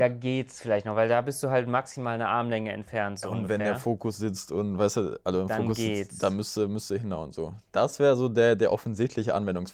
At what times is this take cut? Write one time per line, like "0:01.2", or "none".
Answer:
none

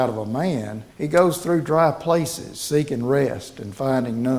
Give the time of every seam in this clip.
0:00.9

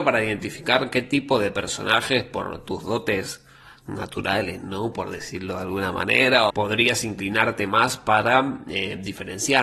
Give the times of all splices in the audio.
0:06.5

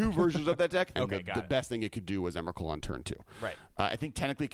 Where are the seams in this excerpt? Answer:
0:00.9

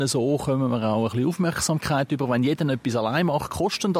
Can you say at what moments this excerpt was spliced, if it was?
none

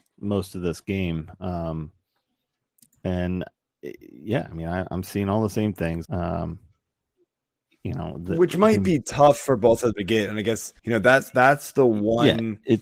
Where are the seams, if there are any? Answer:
0:06.0
0:10.8

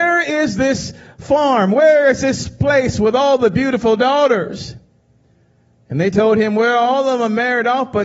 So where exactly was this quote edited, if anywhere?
none

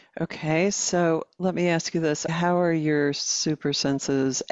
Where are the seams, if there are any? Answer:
0:02.3

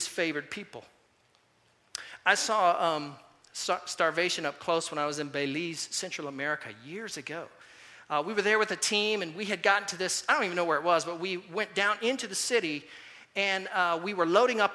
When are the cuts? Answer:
none

